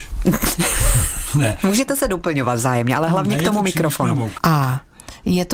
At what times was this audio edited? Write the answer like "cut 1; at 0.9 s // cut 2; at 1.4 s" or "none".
cut 1; at 4.4 s